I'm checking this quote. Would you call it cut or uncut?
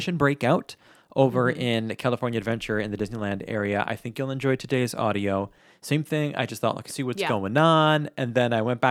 cut